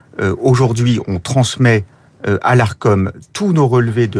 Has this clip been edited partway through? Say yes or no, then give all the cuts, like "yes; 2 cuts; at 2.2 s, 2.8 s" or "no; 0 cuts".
no; 0 cuts